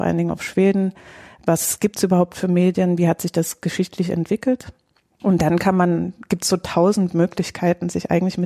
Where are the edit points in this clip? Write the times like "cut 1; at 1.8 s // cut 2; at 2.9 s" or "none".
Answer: none